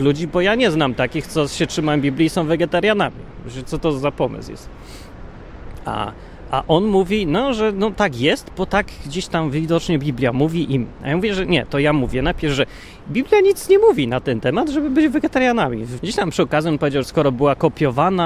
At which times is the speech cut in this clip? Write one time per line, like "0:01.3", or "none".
0:16.0
0:17.0